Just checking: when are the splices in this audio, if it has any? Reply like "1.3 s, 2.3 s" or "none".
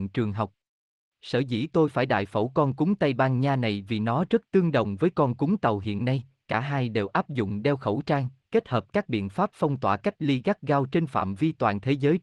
8.4 s